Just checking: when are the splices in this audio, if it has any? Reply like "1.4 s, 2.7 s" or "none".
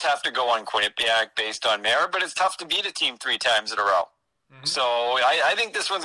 none